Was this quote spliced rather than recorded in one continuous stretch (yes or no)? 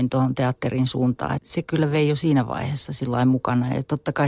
yes